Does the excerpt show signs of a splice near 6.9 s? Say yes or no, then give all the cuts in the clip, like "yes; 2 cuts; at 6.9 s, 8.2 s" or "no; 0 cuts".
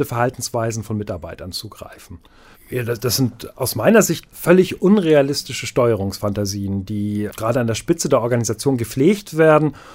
no; 1 cut; at 2.5 s